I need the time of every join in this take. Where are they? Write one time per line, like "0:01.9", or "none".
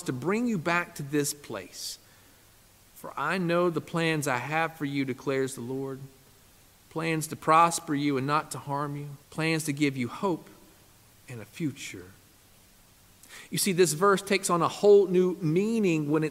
0:09.2